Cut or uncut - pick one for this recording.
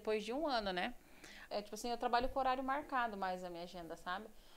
cut